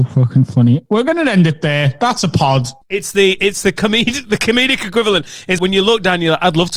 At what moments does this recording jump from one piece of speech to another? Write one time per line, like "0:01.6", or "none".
0:02.8
0:05.6